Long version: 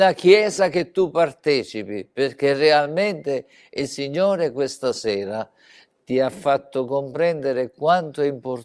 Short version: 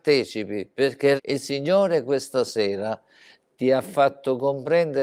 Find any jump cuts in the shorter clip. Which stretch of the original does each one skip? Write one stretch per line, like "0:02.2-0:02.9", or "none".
0:02.5-0:03.6